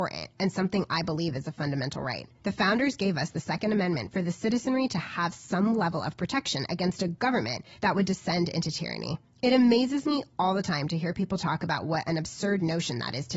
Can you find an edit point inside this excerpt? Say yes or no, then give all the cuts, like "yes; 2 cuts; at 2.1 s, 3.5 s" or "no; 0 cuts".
yes; 1 cut; at 2.4 s